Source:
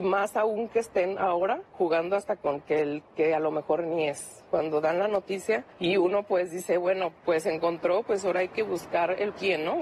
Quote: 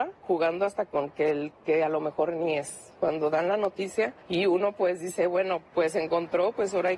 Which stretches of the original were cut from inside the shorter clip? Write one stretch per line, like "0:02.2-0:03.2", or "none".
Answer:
none